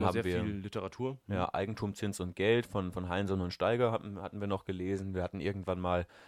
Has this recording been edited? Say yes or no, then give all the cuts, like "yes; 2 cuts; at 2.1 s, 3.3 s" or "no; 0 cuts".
no; 0 cuts